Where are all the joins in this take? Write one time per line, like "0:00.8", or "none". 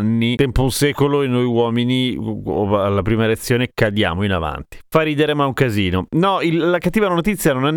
none